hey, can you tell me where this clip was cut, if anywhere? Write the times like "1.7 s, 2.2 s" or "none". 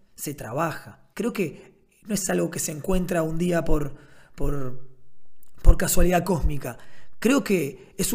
1.1 s